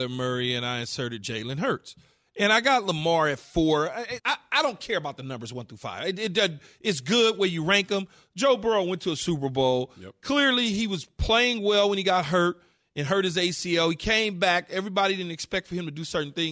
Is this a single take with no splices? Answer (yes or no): no